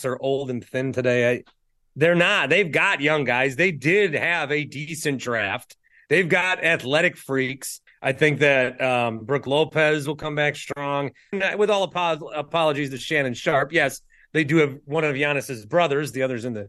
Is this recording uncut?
no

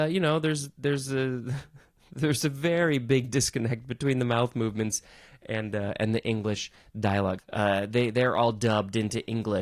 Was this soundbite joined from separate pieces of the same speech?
yes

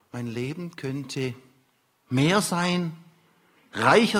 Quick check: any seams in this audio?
no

